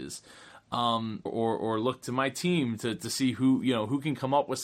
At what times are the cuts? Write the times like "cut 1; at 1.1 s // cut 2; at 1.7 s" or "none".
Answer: cut 1; at 1.3 s